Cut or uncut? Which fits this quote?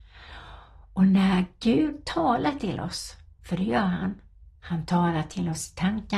uncut